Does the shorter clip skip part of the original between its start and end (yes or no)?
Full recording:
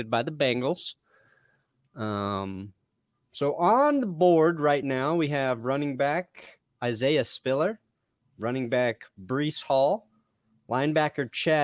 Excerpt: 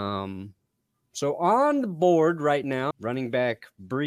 yes